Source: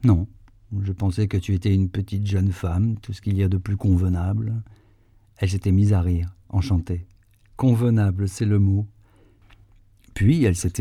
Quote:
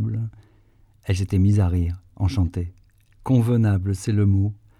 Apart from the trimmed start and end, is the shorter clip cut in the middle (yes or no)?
no